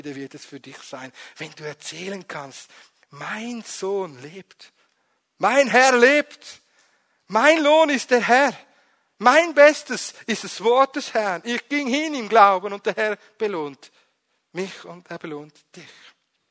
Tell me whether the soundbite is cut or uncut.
uncut